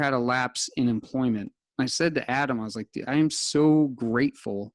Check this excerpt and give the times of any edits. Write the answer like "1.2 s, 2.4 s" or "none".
none